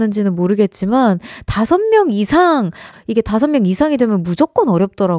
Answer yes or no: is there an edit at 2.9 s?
yes